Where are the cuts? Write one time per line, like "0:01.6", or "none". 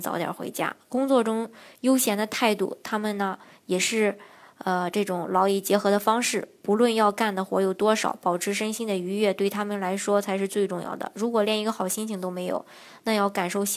none